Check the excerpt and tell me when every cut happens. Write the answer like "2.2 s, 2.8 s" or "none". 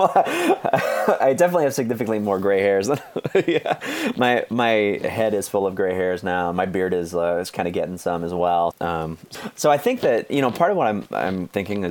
8.7 s